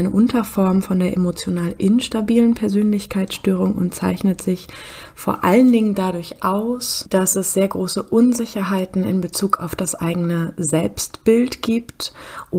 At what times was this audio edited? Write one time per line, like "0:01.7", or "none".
none